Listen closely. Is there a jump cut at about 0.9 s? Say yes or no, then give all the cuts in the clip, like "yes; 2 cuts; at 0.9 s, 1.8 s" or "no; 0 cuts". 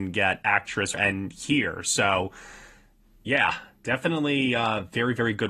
yes; 1 cut; at 0.9 s